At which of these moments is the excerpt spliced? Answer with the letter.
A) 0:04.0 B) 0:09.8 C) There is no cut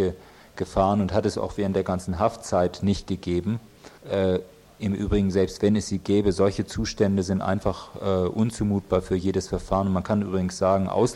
A